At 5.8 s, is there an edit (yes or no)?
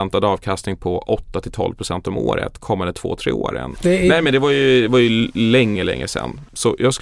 yes